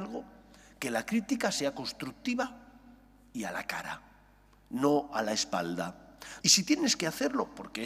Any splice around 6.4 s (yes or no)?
yes